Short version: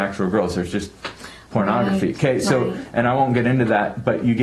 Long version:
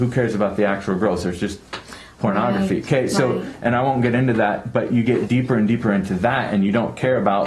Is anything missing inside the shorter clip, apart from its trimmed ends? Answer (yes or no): no